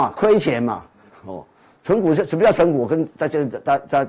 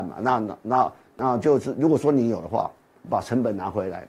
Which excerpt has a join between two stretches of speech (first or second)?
first